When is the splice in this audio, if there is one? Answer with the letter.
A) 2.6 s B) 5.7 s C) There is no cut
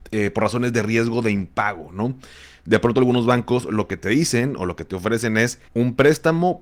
B